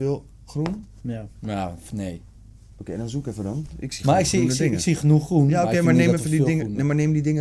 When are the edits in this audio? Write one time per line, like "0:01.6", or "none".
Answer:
0:01.4